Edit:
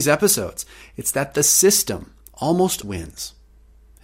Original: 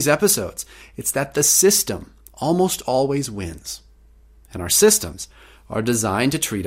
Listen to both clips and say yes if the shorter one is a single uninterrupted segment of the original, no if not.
no